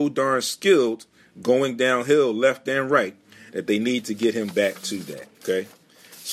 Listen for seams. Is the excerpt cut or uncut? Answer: cut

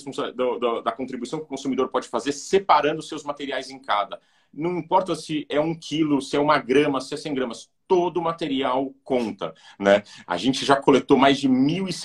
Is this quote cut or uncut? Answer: cut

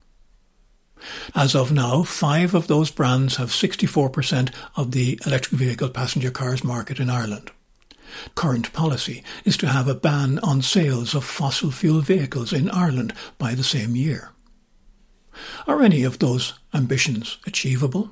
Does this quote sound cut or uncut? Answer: cut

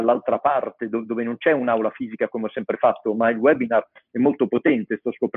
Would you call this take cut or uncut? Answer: uncut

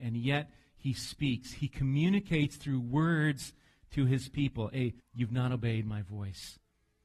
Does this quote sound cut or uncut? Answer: cut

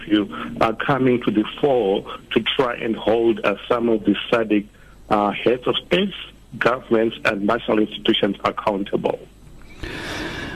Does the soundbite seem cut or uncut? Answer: uncut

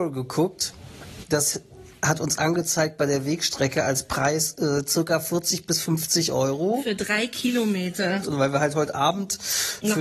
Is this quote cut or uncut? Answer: cut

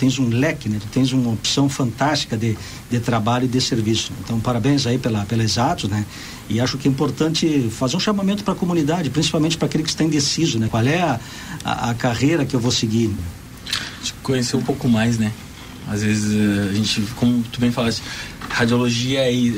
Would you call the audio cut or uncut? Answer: cut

